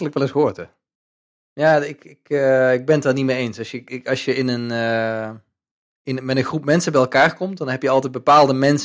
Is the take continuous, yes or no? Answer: yes